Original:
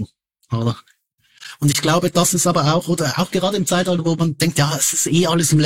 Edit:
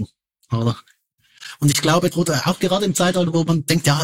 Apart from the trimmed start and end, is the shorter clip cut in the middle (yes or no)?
yes